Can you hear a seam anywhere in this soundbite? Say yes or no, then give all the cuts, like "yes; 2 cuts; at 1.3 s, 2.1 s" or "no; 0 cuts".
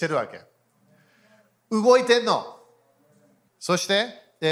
yes; 1 cut; at 3.5 s